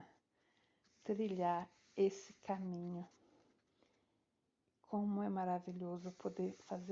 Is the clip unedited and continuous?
yes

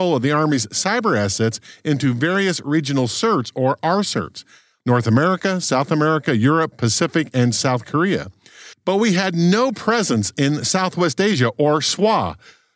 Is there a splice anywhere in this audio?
no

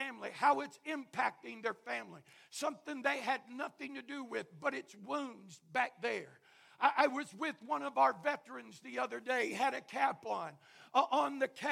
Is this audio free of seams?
yes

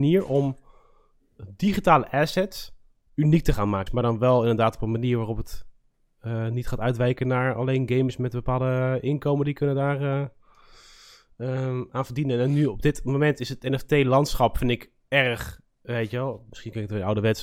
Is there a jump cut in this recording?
yes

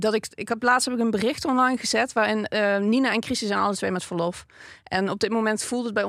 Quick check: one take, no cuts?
yes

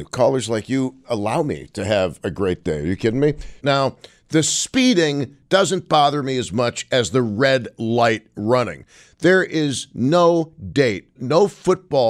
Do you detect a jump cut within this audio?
yes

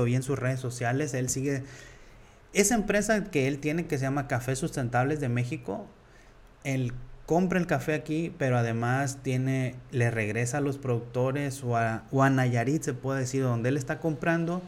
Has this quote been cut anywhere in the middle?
no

